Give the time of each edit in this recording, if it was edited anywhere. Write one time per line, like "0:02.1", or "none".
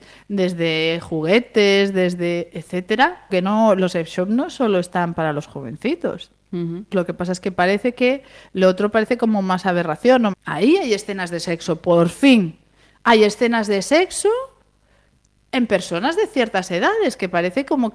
0:03.3
0:06.9
0:10.3